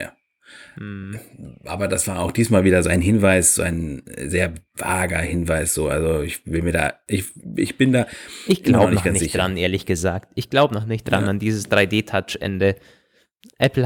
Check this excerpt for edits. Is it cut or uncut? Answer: uncut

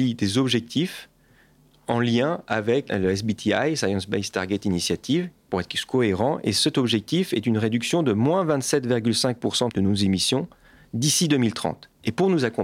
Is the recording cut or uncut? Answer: uncut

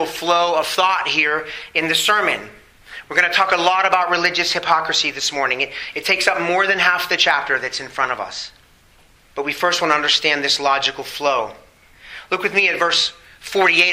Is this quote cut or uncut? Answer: cut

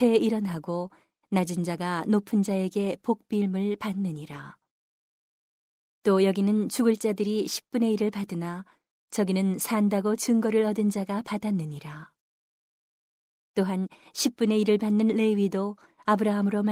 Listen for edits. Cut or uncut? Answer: uncut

